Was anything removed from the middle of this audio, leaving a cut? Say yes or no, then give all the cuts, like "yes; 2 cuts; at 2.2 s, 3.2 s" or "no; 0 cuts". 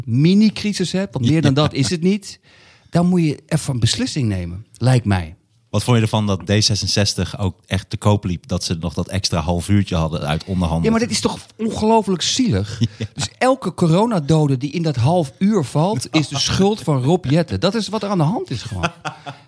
no; 0 cuts